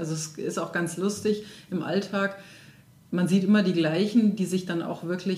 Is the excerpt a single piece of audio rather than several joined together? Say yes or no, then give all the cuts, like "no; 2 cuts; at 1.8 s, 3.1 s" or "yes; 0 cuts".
yes; 0 cuts